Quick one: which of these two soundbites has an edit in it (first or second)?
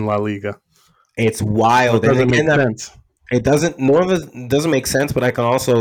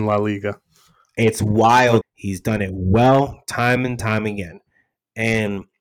second